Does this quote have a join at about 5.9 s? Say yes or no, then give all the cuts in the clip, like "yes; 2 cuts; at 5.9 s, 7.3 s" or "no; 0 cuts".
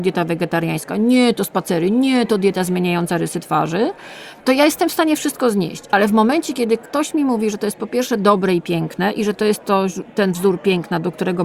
no; 0 cuts